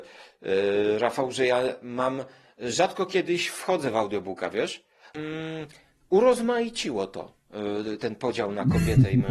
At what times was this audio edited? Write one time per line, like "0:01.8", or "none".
0:05.1